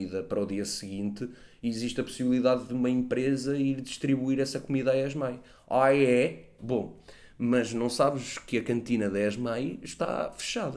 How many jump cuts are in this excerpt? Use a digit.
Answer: 1